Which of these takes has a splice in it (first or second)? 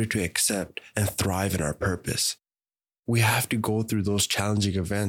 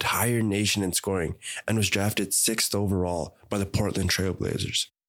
first